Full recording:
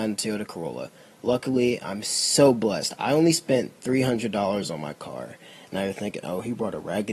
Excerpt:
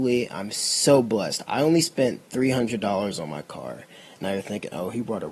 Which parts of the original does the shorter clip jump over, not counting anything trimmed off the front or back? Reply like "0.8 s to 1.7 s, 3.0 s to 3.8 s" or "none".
none

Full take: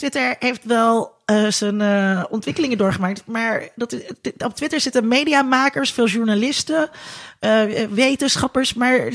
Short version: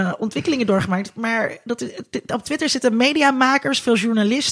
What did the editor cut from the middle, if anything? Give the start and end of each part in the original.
none

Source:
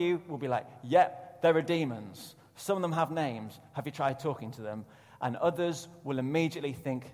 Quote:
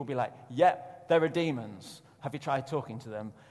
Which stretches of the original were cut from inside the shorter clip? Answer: 2.5 s to 3.7 s

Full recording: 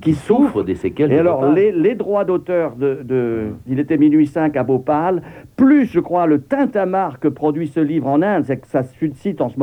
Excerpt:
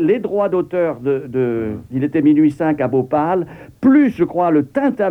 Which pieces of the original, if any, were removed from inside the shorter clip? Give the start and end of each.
none

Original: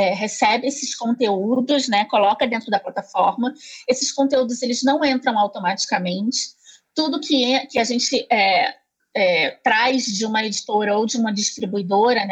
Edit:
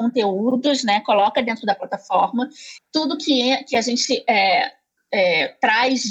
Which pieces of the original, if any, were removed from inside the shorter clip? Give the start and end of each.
3.8 s to 6.8 s

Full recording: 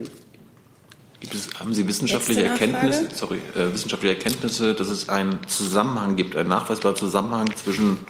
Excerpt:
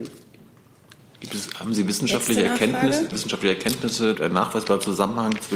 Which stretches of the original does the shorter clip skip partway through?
3.1 s to 3.7 s, 4.7 s to 6.3 s

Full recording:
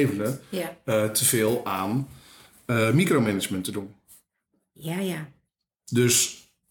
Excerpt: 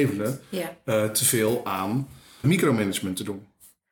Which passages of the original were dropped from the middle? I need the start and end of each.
2.4 s to 2.9 s

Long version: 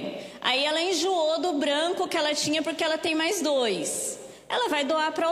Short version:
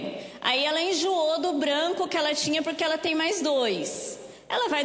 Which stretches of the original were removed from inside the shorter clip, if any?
none

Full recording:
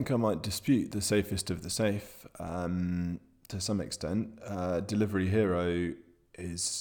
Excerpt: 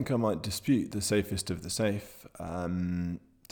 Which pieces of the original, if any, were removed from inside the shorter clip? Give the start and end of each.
none

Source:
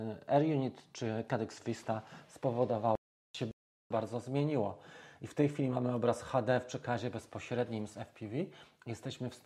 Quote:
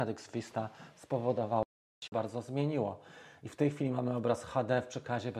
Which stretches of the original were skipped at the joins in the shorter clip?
3.4 s to 3.8 s

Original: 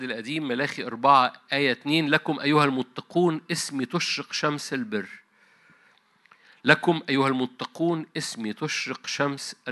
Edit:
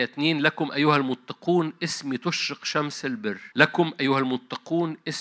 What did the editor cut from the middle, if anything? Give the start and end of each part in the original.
5.2 s to 6.6 s

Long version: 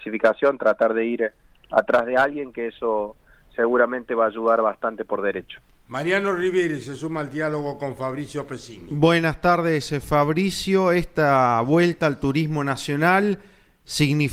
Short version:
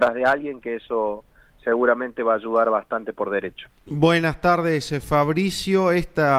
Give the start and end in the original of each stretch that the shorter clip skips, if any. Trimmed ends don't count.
5.8 s to 8.9 s

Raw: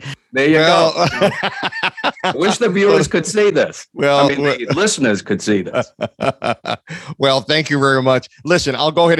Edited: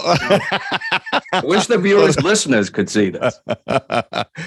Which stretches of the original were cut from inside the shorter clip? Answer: 3.1 s to 4.7 s

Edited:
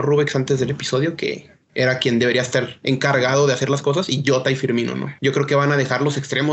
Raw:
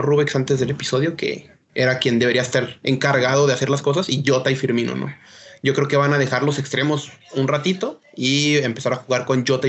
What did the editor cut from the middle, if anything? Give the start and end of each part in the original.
5.2 s to 5.6 s

